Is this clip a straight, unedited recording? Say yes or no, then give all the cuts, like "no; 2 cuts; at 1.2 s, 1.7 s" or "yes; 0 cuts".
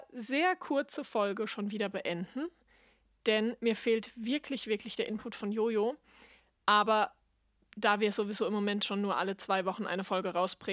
yes; 0 cuts